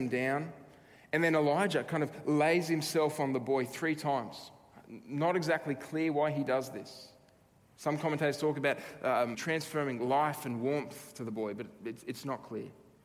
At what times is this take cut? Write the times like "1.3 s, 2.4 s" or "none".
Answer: 9.3 s